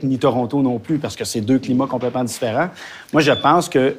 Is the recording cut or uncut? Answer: uncut